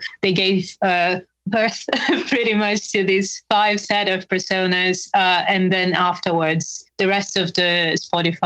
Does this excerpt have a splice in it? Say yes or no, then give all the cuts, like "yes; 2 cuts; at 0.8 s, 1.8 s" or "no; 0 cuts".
no; 0 cuts